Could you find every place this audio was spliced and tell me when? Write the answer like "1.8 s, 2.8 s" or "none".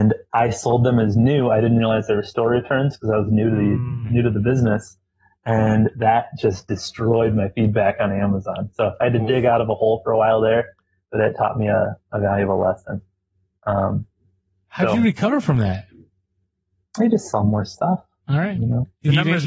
none